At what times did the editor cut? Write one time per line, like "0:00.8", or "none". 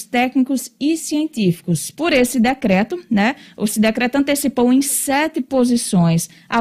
0:02.0